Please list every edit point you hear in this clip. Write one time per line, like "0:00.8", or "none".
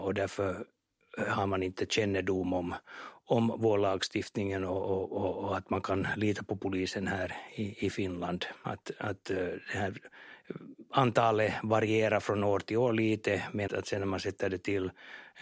0:08.6
0:13.7

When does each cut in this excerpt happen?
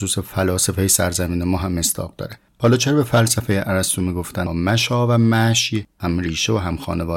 0:04.5

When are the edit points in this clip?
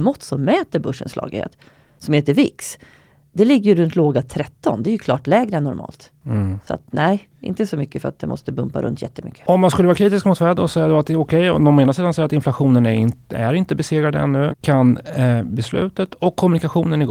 0:14.5

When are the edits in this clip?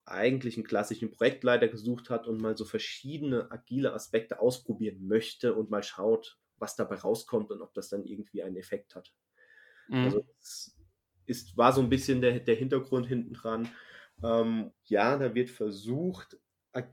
0:14.7

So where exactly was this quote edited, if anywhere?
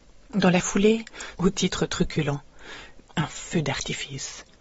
0:01.3
0:03.0

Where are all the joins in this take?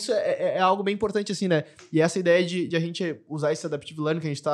none

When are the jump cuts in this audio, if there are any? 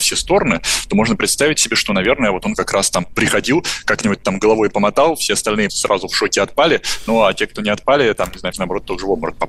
0:05.7
0:08.5

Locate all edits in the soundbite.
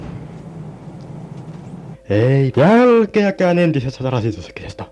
0:01.9

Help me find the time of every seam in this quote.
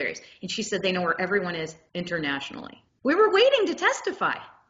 0:02.9

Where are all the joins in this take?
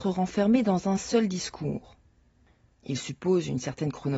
0:02.7

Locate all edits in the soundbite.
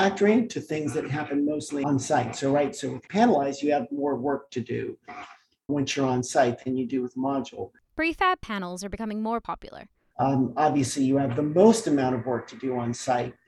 0:05.7
0:10.1

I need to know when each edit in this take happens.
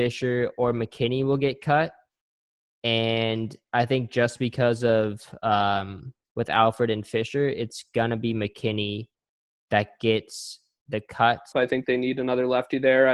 0:06.2
0:11.5

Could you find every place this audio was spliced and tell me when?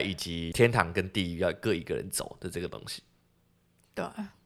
none

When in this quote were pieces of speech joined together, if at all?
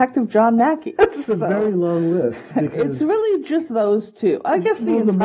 0:01.0

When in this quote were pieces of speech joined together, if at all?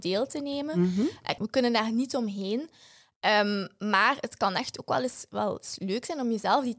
0:01.4

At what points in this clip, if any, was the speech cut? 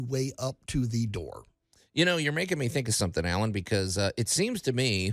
none

